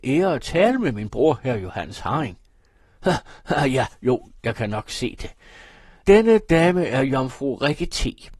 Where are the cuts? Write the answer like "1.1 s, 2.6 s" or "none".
none